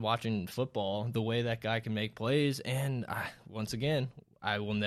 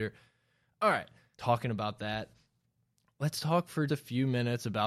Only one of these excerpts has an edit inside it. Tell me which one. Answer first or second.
second